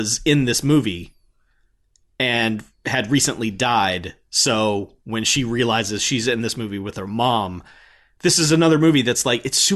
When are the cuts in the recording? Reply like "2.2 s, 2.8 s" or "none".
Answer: none